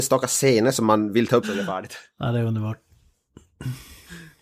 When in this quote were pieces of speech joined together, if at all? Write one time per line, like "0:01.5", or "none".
0:01.4